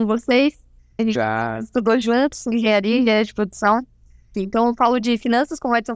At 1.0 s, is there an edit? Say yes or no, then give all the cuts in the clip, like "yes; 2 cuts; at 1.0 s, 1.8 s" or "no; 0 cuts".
yes; 2 cuts; at 1.0 s, 4.3 s